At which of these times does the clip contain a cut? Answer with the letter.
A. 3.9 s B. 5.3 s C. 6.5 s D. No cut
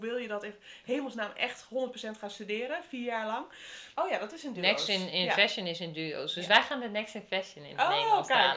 A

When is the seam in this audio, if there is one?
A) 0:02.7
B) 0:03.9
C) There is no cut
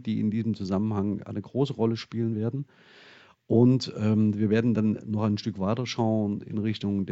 C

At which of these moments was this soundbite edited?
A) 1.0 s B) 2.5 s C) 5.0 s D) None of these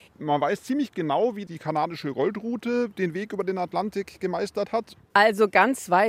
C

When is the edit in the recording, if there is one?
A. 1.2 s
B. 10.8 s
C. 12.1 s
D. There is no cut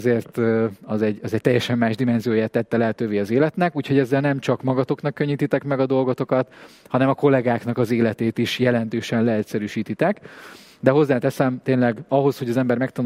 C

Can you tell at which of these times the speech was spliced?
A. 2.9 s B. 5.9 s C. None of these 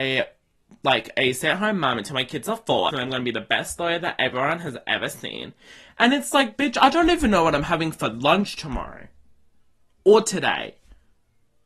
A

